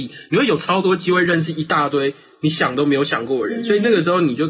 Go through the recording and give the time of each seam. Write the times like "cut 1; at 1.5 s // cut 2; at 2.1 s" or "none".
none